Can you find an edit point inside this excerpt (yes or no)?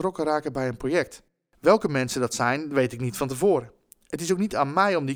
no